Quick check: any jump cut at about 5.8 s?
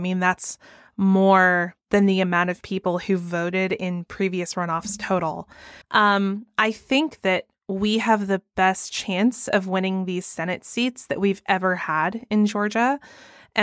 yes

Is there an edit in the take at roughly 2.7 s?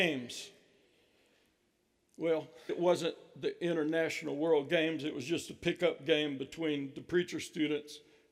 yes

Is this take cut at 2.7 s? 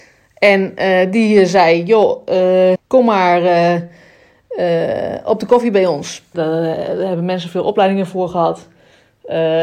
yes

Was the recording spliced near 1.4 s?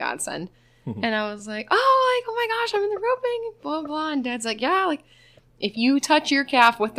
no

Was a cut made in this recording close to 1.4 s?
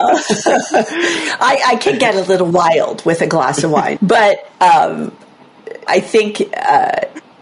no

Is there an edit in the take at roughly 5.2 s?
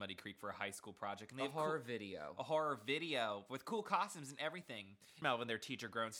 yes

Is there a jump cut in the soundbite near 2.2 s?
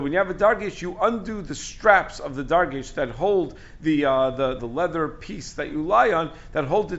no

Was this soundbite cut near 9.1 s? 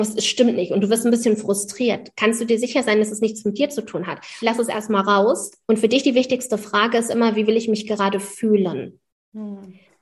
no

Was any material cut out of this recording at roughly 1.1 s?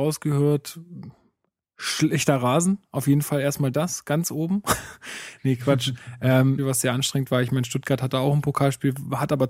no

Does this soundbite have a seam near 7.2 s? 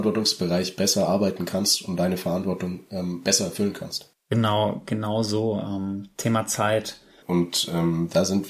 yes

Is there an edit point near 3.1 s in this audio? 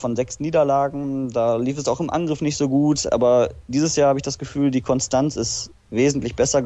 no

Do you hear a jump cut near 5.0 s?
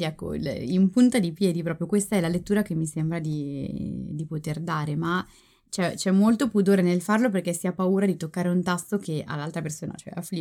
no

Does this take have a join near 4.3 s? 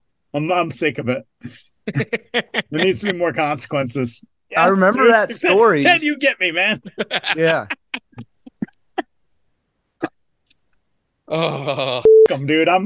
yes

